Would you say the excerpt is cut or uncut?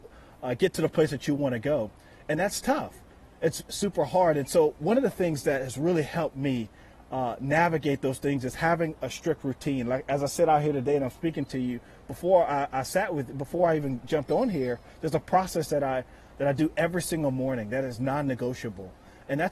uncut